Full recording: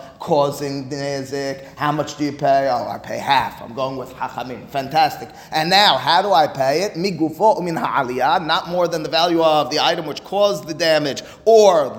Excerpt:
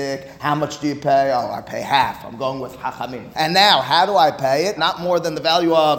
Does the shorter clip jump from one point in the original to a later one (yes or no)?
yes